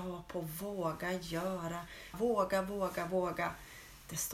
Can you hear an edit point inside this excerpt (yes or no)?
yes